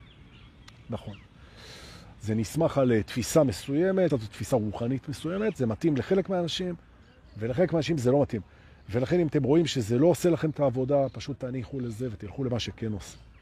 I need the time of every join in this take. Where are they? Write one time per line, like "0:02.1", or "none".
0:02.1
0:04.1